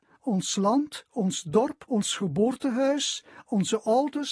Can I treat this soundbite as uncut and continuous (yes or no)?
no